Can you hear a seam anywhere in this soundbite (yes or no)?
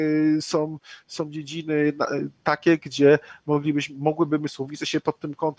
no